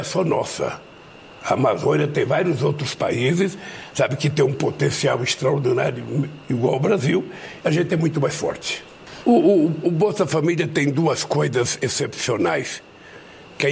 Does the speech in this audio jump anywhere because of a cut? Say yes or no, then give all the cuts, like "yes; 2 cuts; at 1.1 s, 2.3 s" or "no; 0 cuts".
yes; 2 cuts; at 7.6 s, 9.2 s